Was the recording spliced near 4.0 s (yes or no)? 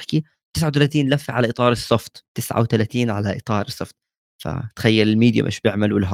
no